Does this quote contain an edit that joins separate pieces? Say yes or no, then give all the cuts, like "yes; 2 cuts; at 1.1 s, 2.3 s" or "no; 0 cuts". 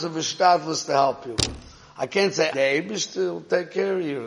yes; 1 cut; at 2.5 s